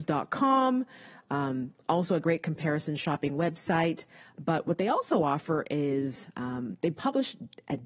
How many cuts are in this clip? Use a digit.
0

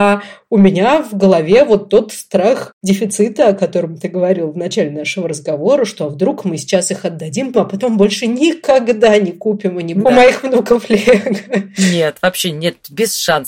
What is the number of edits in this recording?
2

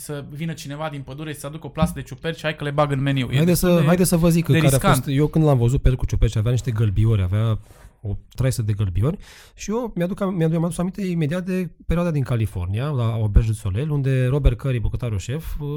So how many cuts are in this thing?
0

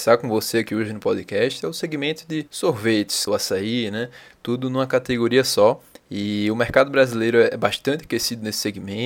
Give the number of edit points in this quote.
1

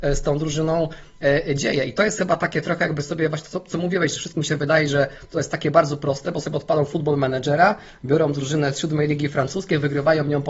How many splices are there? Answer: 0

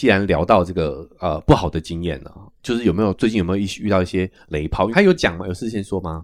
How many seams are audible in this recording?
1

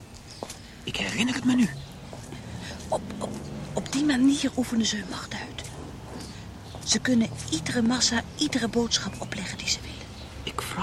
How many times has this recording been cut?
0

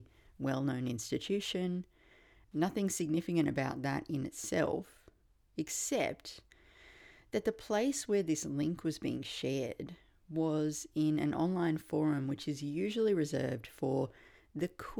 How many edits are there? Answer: 0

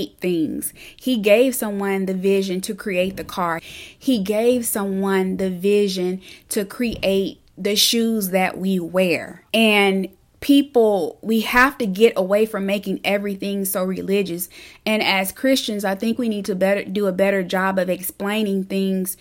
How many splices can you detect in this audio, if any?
2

